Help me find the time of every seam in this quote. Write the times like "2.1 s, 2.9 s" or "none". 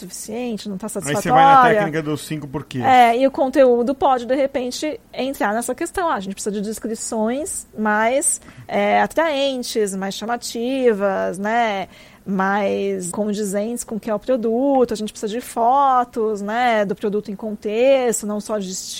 13.1 s